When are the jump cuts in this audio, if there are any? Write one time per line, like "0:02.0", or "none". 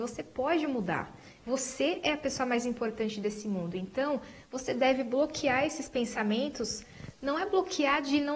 none

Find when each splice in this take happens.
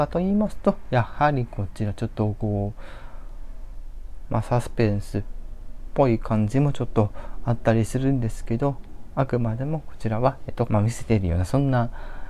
0:10.7

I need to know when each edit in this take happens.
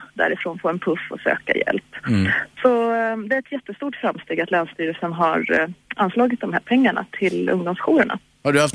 0:05.8

